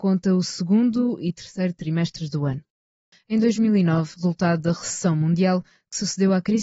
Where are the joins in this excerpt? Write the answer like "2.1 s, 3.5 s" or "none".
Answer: 3.1 s, 4.1 s